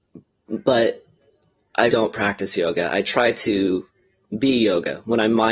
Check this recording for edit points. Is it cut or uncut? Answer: cut